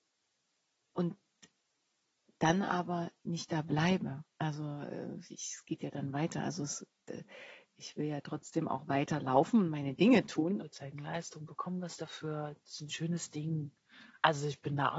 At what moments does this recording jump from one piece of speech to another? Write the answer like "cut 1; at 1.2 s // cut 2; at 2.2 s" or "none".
cut 1; at 10.6 s